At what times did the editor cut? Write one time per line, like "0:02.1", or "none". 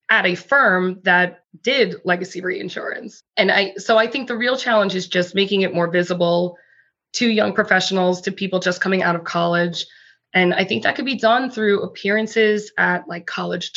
none